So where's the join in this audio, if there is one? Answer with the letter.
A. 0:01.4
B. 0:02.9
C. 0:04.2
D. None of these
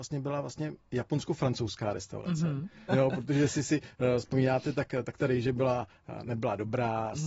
B